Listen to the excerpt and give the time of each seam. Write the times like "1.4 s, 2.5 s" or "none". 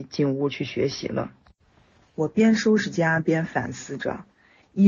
none